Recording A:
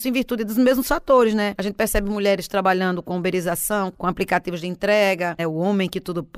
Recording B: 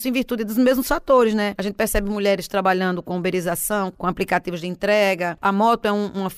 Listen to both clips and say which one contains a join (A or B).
A